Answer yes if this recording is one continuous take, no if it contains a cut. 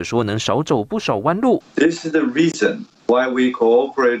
no